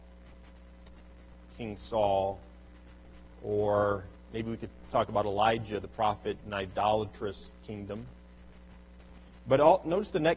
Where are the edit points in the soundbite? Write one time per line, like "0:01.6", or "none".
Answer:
0:03.3
0:06.4